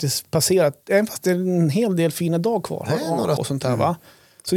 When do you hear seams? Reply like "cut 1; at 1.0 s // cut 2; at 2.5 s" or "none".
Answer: cut 1; at 3.4 s